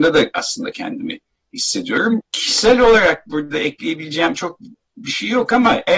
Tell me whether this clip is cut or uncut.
cut